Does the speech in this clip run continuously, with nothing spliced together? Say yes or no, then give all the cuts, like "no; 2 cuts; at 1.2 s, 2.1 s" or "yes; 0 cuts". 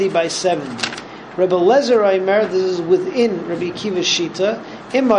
yes; 0 cuts